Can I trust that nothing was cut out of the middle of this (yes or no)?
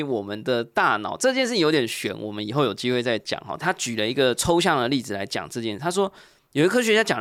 yes